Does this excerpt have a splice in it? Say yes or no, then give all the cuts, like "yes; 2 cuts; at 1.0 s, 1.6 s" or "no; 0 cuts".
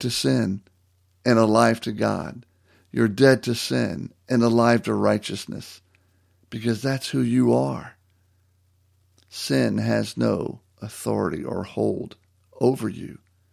no; 0 cuts